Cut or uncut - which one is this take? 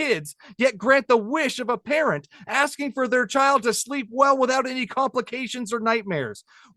uncut